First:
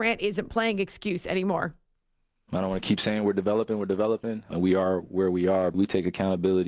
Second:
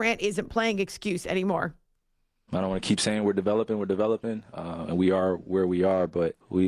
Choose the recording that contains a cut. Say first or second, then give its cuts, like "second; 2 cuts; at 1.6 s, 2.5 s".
first; 2 cuts; at 4.5 s, 5.7 s